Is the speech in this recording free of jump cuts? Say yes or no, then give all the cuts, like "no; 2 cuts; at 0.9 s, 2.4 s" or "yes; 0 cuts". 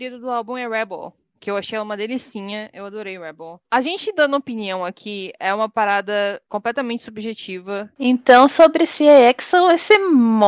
no; 2 cuts; at 3.6 s, 7.9 s